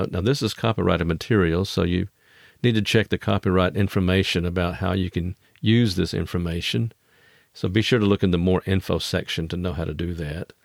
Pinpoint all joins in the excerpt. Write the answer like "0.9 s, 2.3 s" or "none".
none